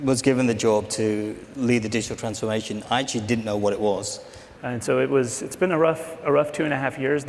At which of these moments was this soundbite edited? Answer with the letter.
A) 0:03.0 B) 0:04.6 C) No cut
B